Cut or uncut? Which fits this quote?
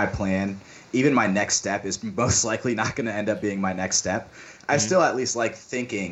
uncut